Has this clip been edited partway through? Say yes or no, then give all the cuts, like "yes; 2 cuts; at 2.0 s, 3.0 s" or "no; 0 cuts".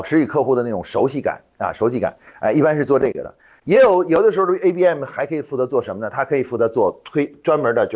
no; 0 cuts